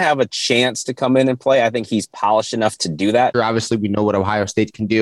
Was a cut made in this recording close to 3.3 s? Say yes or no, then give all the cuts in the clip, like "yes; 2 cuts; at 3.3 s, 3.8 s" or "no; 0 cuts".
yes; 1 cut; at 3.3 s